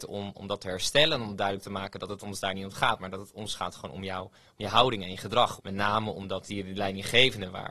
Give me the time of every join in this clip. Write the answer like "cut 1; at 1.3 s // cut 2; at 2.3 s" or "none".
cut 1; at 5.6 s